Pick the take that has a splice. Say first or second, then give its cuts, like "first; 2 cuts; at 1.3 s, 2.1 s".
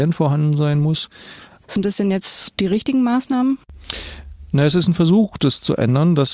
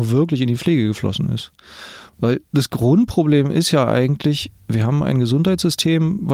first; 1 cut; at 1.6 s